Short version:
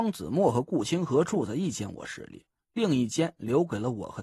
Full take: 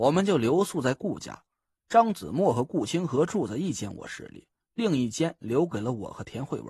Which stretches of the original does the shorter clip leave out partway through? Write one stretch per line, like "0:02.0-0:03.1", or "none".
none

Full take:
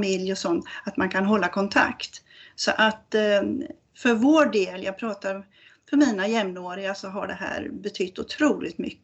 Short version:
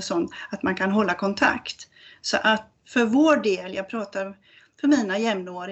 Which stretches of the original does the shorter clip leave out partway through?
0:03.1-0:03.8

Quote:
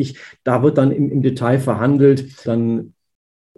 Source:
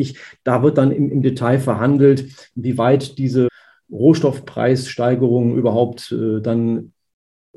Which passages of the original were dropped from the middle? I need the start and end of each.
0:02.4-0:06.4

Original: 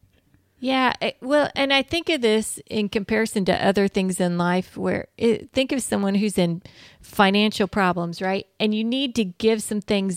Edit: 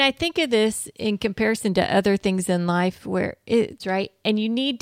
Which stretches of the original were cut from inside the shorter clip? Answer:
0:05.5-0:08.1

